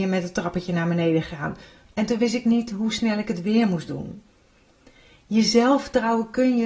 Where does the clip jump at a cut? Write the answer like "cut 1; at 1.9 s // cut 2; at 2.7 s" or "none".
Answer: cut 1; at 1.9 s